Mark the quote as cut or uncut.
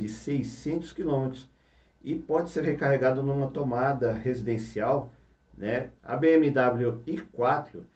cut